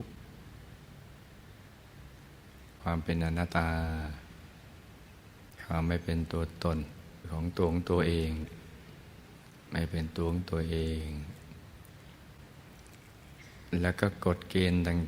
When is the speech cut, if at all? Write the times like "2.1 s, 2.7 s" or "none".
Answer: 3.5 s